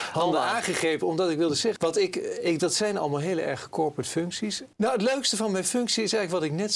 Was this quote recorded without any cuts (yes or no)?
no